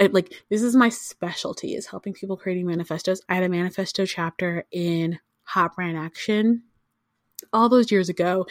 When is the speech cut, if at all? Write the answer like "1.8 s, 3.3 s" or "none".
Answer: 3.3 s